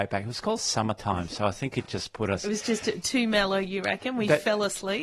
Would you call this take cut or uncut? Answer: uncut